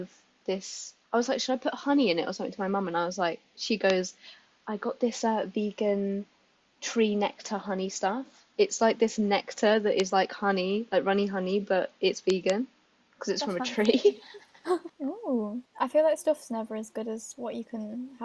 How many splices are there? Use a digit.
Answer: 2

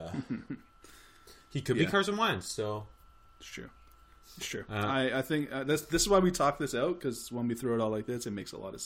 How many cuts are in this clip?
0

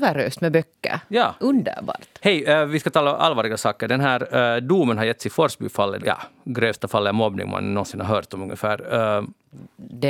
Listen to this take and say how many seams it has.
1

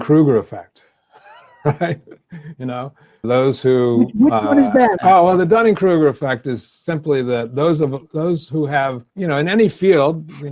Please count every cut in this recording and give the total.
3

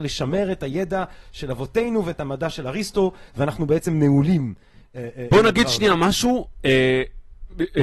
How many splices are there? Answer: 0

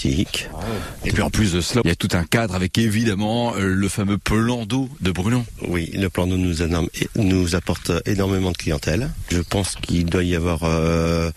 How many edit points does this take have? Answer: 1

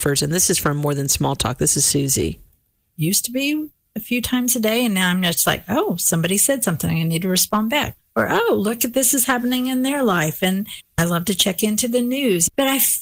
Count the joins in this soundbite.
1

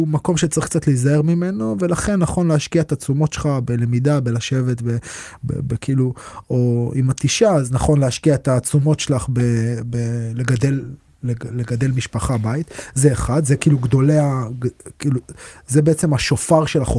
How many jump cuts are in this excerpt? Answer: 0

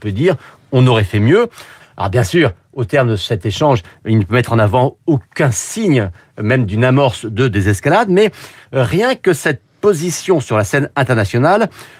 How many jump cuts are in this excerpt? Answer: 1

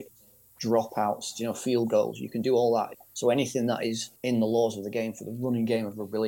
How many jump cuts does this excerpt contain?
2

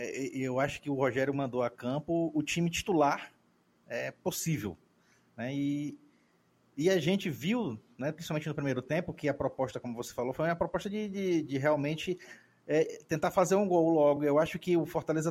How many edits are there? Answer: 0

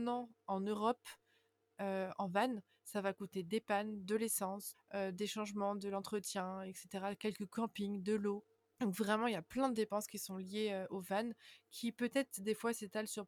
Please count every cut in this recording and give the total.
1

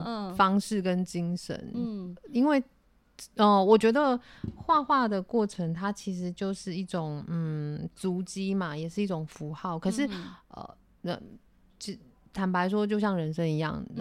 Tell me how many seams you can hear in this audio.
0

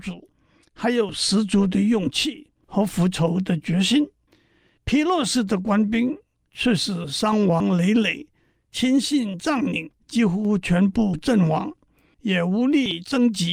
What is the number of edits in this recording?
0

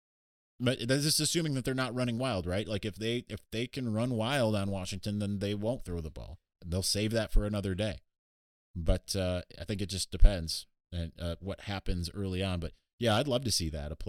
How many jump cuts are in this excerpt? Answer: 0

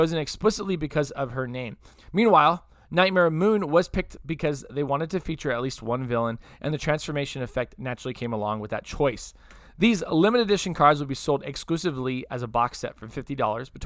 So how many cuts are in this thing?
1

